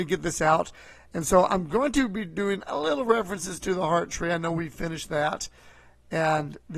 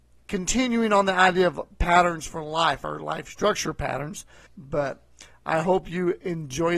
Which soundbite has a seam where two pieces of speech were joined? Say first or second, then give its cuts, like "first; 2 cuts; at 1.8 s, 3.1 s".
second; 1 cut; at 4.5 s